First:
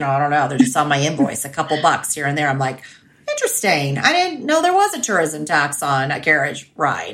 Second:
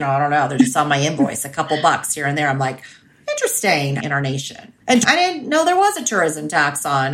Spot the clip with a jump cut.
second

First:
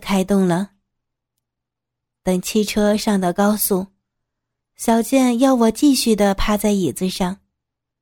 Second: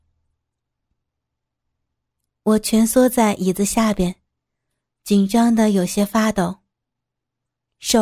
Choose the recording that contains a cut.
first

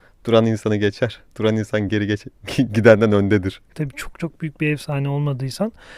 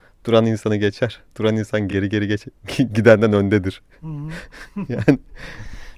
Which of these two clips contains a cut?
first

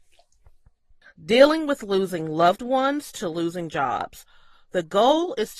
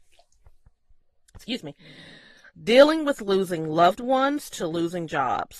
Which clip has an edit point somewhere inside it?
first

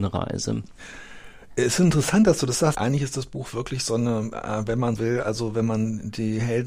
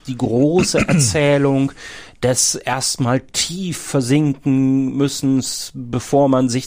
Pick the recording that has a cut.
first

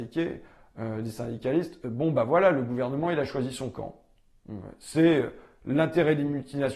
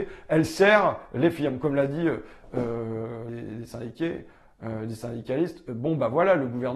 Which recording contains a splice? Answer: second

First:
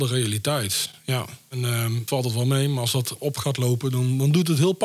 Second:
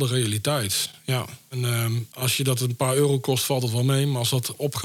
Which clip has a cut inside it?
first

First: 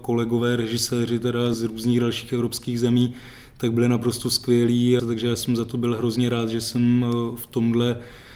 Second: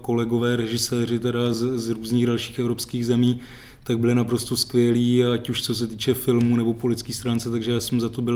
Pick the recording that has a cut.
first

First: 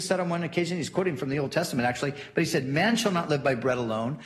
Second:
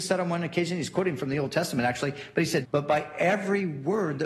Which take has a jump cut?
second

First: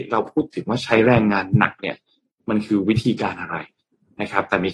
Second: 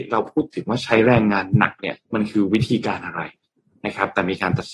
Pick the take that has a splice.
second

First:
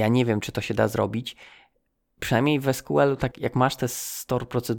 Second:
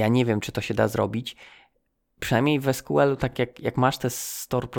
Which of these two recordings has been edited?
first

